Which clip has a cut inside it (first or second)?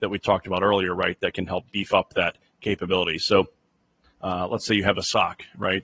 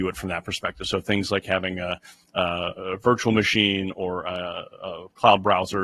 first